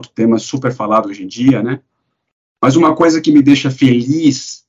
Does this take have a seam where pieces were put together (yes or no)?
no